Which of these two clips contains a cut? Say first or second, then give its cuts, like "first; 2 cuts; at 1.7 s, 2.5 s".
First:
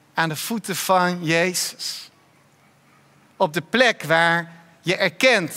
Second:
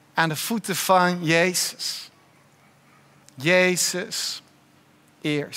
second; 1 cut; at 3.2 s